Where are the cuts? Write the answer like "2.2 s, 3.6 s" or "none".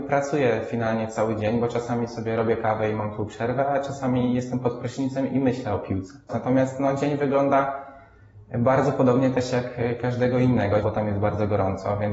6.3 s, 10.8 s